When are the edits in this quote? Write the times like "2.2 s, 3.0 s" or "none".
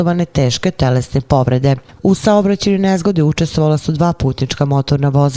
2.0 s